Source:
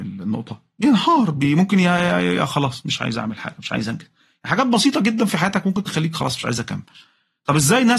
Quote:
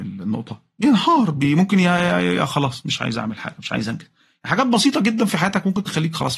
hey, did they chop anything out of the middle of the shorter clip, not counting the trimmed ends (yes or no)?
no